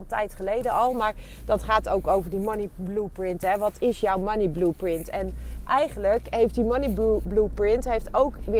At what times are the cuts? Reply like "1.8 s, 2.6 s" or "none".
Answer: none

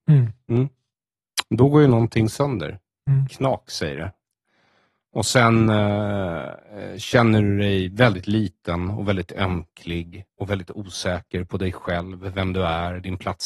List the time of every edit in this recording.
none

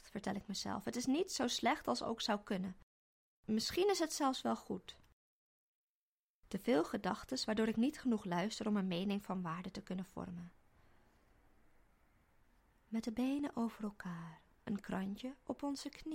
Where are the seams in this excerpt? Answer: none

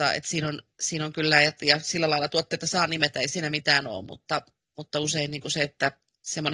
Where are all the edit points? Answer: none

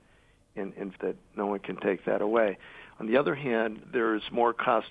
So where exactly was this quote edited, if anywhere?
1.0 s, 3.8 s

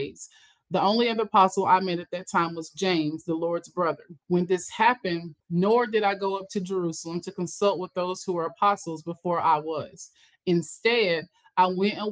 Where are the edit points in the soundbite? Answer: 4.2 s, 5.4 s

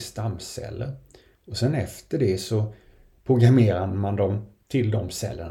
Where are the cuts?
none

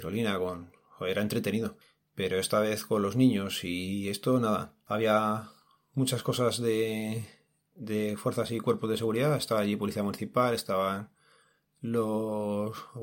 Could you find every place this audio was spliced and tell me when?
none

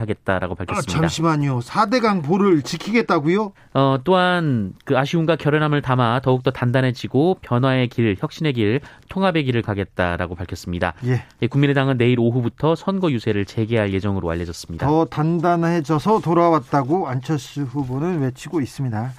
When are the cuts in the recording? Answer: 3.5 s

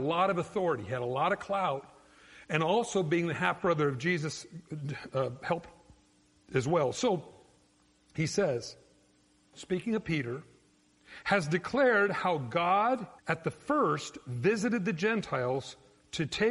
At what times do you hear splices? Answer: 9.5 s, 13.2 s

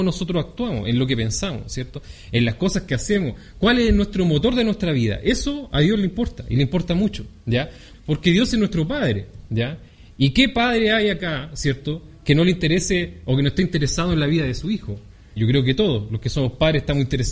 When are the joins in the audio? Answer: 7.9 s, 15.4 s

